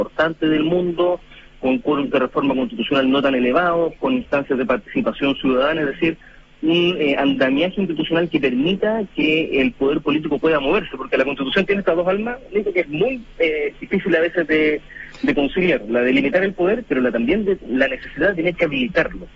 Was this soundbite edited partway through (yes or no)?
no